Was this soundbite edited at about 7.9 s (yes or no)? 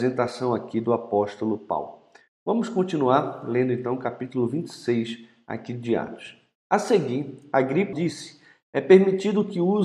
yes